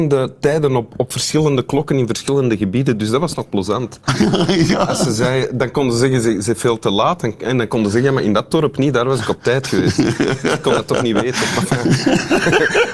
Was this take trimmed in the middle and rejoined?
no; 0 cuts

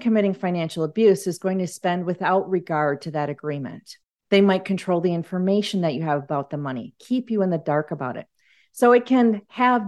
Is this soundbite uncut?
no; 1 cut; at 4.2 s

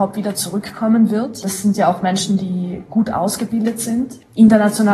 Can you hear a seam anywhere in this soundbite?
no; 0 cuts

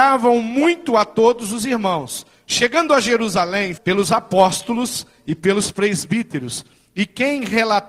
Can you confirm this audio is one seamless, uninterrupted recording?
no; 1 cut; at 3.8 s

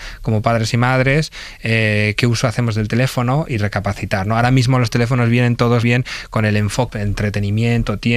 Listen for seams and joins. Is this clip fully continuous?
no; 2 cuts; at 5.8 s, 6.9 s

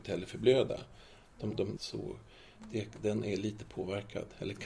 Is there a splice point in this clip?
yes; 1 cut; at 1.8 s

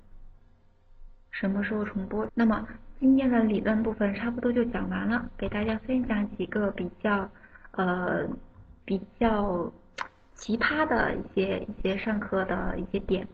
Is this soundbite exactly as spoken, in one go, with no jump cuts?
no; 1 cut; at 2.3 s

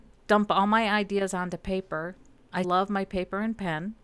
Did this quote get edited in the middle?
yes; 1 cut; at 2.6 s

